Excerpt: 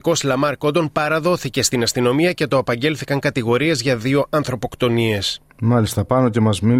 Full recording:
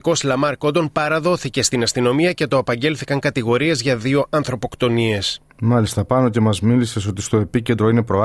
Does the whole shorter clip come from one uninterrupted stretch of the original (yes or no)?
yes